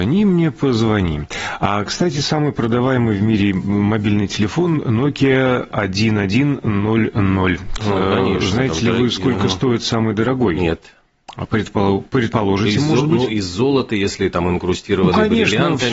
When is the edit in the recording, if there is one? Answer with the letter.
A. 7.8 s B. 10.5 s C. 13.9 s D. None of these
A